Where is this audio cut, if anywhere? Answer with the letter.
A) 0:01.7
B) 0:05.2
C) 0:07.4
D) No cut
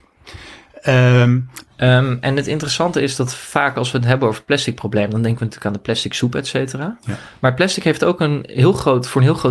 A